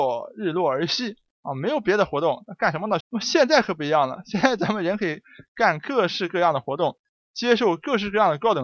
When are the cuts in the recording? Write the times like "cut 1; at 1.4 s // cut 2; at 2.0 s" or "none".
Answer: cut 1; at 3.0 s